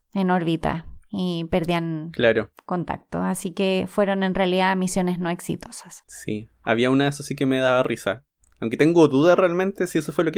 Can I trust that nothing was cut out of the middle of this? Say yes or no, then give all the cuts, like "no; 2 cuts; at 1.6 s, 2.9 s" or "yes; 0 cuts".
yes; 0 cuts